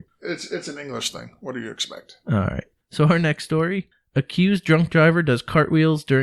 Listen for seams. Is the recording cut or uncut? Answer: uncut